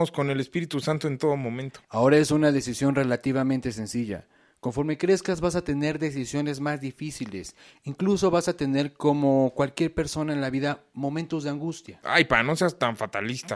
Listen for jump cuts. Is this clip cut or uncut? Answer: cut